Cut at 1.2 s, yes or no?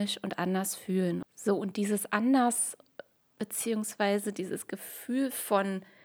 yes